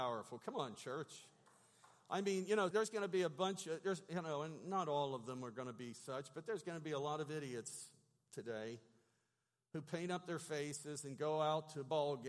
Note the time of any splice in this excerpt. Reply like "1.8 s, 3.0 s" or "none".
2.7 s